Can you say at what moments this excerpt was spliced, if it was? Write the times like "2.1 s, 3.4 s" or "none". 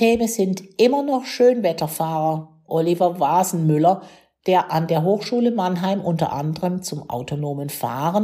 2.7 s